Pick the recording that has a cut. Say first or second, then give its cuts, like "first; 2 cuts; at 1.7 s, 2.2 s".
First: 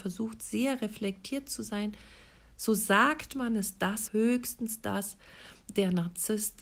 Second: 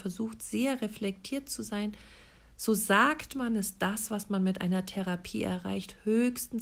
first; 1 cut; at 4.1 s